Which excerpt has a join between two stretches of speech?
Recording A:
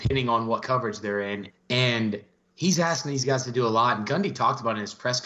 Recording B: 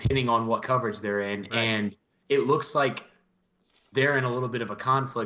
A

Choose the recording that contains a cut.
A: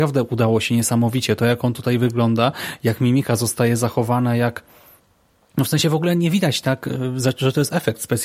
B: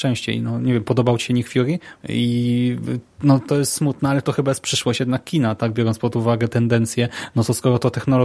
B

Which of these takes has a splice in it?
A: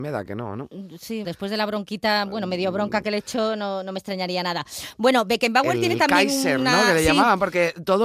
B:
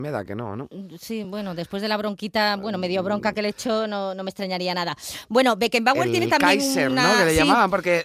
A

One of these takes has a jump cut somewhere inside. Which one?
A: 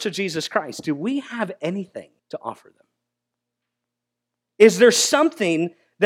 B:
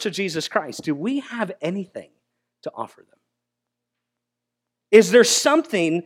A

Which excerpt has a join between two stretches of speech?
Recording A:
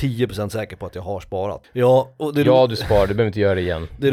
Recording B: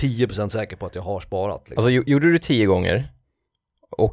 A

